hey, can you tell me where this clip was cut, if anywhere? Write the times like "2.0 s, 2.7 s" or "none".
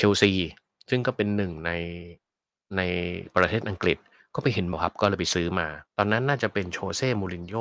4.7 s, 5.9 s